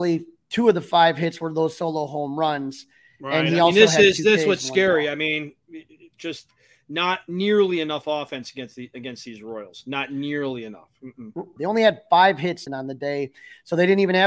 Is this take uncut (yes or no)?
no